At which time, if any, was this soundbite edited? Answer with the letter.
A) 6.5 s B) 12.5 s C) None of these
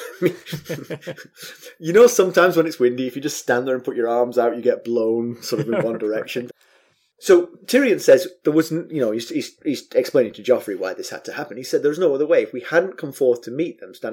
A